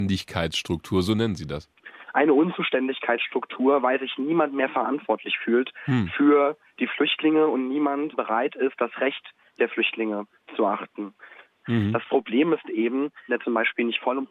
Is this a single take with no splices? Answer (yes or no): no